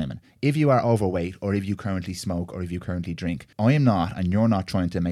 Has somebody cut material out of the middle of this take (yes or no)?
yes